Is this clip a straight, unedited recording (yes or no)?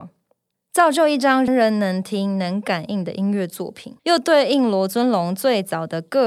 no